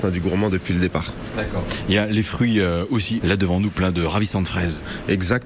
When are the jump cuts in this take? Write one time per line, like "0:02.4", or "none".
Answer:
0:03.2